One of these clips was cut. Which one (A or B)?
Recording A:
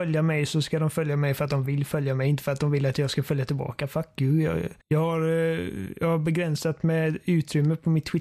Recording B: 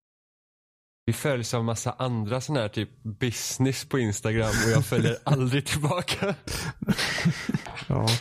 A